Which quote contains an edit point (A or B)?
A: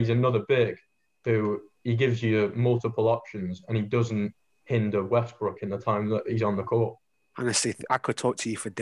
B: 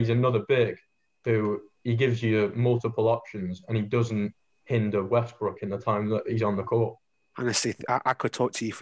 A